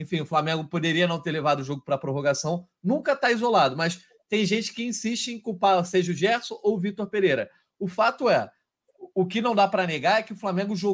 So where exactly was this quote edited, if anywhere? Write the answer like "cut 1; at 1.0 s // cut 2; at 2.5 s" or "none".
none